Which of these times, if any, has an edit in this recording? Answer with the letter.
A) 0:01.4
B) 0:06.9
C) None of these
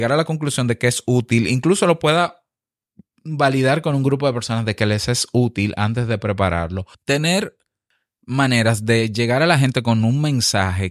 B